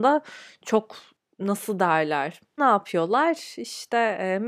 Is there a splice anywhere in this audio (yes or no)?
yes